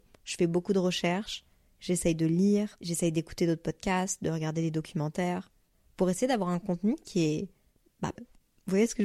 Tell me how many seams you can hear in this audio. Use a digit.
1